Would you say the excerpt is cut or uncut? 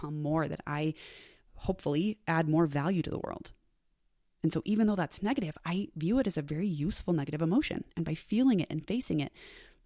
uncut